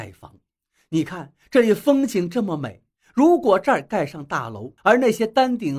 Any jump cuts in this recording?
yes; 1 cut; at 4.8 s

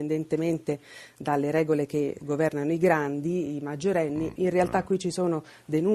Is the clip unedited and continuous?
no; 1 cut; at 4.3 s

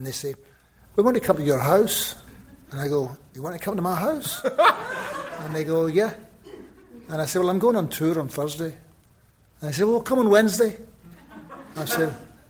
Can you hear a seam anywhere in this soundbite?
no; 0 cuts

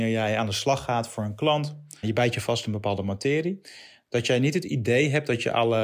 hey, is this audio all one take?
no; 1 cut; at 2.0 s

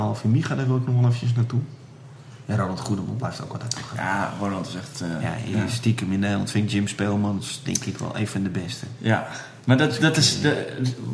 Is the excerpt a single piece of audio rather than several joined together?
yes; 0 cuts

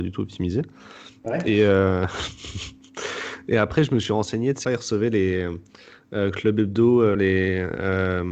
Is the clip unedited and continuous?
no; 2 cuts; at 4.6 s, 7.1 s

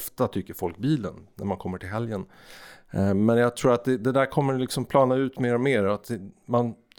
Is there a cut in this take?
no; 0 cuts

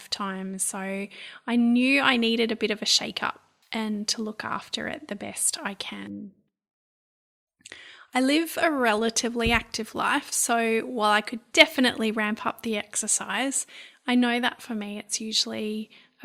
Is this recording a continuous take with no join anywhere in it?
yes; 0 cuts

